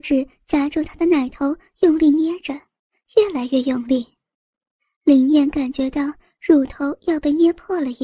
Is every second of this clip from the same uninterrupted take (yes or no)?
yes